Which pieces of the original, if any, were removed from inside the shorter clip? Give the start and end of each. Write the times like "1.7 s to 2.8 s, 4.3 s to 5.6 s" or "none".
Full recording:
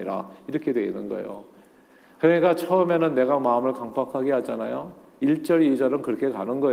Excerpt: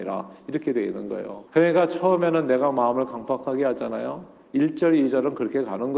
1.5 s to 2.1 s